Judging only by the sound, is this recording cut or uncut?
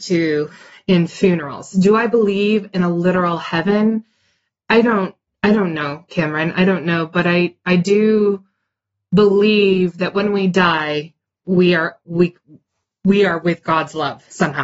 uncut